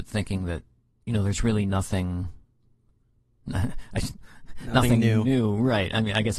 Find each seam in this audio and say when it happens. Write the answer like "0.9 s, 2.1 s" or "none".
none